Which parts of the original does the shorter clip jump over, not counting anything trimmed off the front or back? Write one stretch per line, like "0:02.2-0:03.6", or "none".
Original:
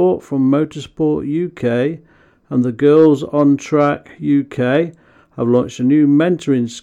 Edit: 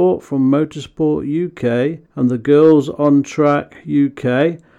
0:02.0-0:02.4